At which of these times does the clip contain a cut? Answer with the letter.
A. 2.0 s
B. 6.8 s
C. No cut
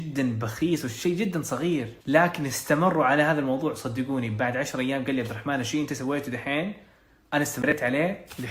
A